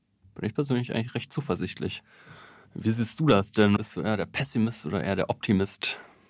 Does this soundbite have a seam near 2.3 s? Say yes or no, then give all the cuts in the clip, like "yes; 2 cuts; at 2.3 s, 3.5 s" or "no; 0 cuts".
no; 1 cut; at 3.8 s